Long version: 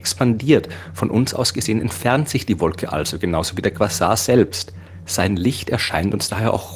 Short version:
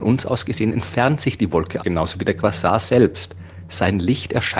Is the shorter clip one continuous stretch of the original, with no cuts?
no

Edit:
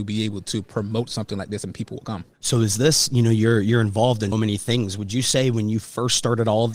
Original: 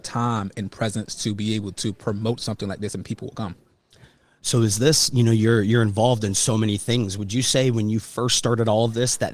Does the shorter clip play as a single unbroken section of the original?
no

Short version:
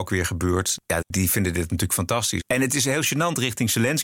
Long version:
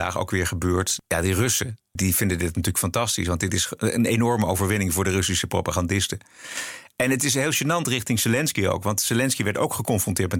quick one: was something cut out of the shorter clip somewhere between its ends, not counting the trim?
yes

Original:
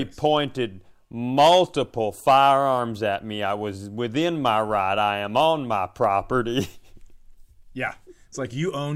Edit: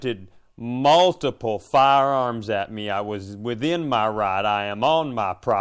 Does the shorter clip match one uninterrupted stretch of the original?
yes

